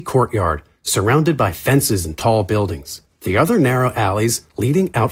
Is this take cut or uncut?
uncut